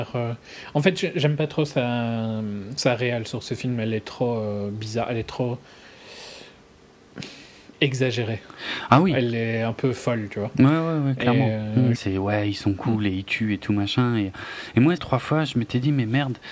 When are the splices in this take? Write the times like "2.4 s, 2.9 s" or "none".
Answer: 12.0 s, 15.0 s

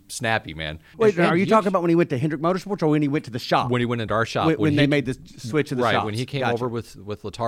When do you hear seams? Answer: 0.9 s

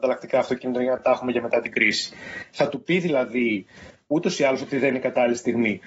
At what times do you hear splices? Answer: none

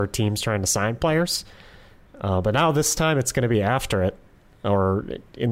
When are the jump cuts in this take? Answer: none

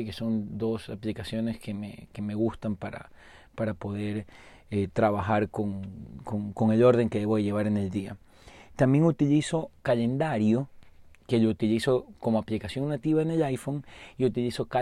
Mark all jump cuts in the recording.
9.8 s

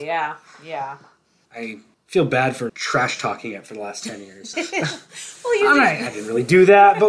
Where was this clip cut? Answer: 2.7 s, 4.5 s

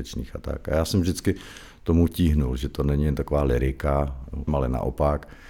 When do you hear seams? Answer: 4.5 s

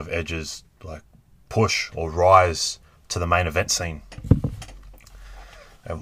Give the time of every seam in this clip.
none

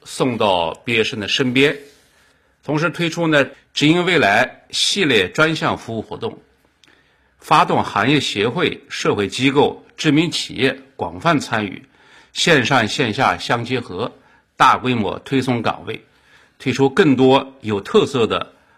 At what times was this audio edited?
none

